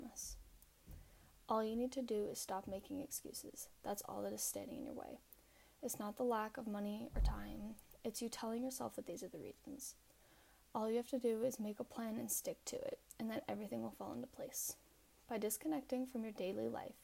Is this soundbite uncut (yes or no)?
yes